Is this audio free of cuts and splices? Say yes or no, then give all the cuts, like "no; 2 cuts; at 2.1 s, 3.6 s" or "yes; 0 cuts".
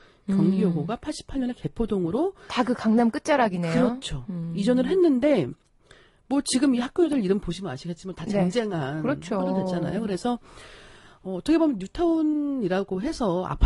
yes; 0 cuts